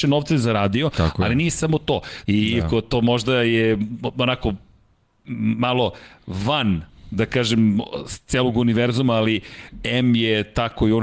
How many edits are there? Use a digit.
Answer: 1